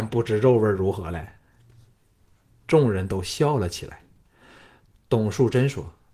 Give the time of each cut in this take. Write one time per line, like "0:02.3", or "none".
0:04.9